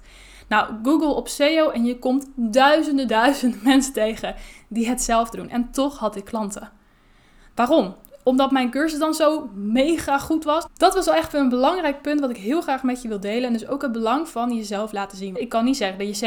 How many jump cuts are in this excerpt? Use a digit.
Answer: 3